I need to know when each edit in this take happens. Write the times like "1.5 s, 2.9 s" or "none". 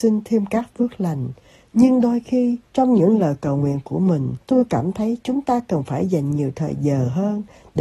2.7 s, 4.4 s

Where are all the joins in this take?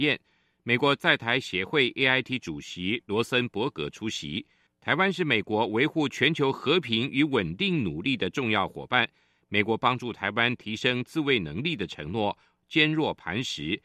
4.7 s

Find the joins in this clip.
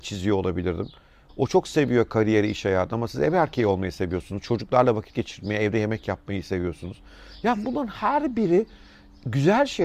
1.3 s

